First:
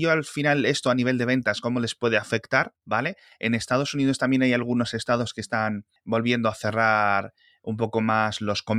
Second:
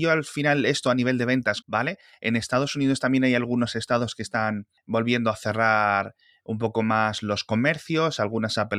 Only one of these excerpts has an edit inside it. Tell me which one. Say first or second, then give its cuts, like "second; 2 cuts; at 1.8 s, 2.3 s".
second; 1 cut; at 1.6 s